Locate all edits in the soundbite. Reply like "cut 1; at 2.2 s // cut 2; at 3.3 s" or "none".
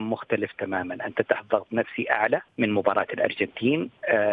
cut 1; at 2.5 s